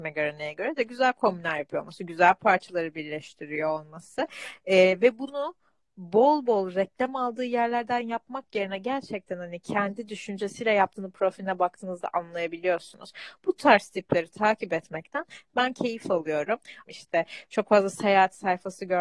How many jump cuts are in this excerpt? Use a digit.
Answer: 1